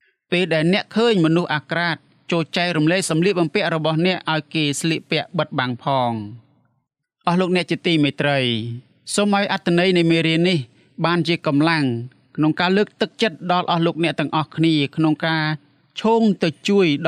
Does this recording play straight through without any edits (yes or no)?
yes